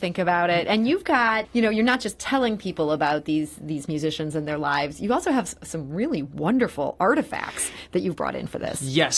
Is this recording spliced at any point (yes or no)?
yes